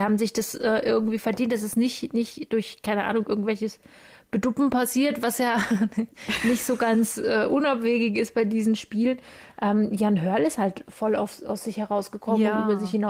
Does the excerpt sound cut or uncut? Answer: uncut